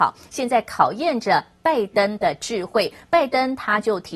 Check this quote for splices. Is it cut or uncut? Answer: uncut